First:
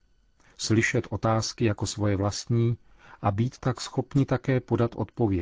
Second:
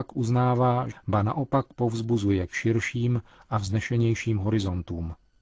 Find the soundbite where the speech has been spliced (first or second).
second